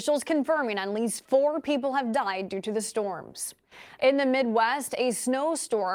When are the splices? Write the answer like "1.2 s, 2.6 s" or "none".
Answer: 4.0 s